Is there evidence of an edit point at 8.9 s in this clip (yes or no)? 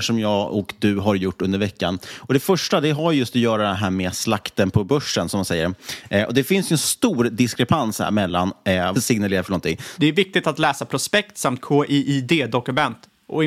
yes